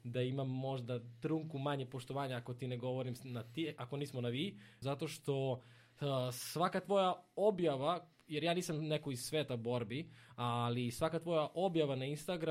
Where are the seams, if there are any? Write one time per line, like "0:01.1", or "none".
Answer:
0:04.8